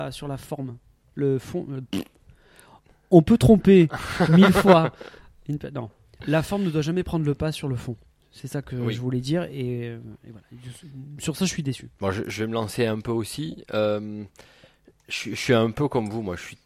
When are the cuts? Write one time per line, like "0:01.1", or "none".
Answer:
0:12.0